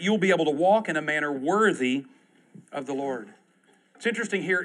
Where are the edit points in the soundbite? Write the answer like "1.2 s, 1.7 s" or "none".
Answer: none